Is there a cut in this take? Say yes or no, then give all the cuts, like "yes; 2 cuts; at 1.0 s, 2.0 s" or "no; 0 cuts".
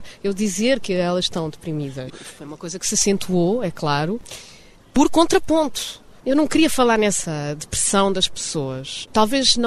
yes; 2 cuts; at 2.1 s, 6.2 s